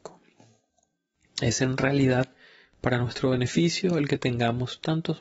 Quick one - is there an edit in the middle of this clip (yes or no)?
no